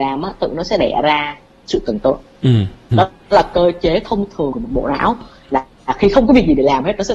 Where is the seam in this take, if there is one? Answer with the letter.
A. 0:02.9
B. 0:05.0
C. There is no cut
A